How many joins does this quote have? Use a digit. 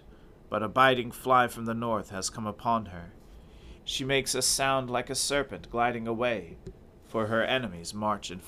1